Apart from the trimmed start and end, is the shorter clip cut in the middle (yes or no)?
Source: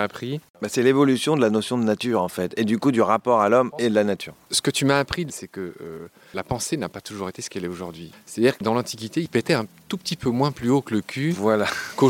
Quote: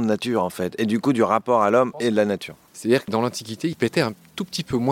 yes